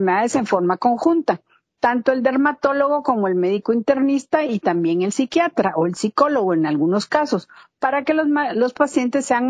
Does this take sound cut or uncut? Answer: uncut